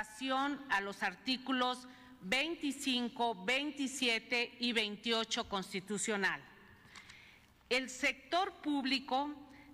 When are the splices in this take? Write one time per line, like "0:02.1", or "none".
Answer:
0:07.6